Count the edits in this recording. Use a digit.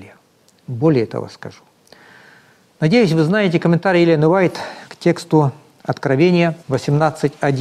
1